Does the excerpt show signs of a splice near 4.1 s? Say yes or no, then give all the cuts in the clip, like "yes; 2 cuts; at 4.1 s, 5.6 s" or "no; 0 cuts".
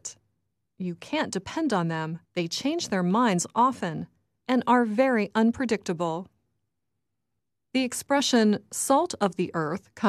no; 1 cut; at 2.2 s